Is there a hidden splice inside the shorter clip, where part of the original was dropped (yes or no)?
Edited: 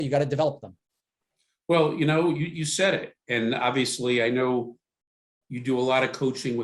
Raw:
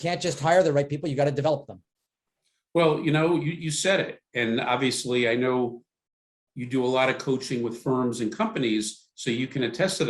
no